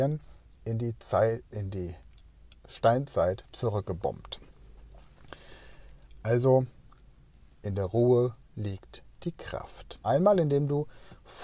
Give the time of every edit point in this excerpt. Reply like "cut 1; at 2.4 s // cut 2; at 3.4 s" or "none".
cut 1; at 10.0 s